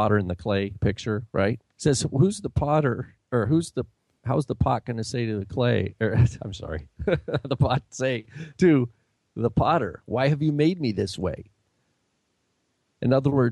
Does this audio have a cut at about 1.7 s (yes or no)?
yes